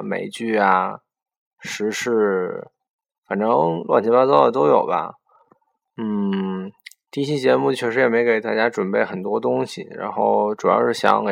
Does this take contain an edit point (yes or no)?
no